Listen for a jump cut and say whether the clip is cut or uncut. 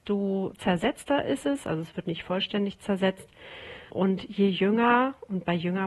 uncut